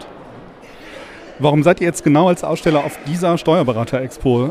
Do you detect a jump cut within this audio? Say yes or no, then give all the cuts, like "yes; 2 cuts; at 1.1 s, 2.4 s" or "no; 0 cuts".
no; 0 cuts